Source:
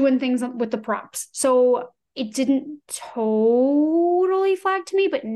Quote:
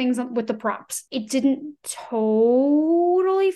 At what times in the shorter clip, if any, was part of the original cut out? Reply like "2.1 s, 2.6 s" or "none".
1.1 s